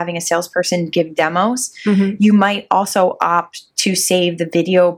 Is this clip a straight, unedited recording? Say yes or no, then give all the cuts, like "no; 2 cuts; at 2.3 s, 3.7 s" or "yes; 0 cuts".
yes; 0 cuts